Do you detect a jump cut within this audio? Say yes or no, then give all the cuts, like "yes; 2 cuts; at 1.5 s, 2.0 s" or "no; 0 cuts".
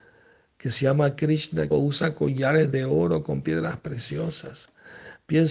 yes; 1 cut; at 1.7 s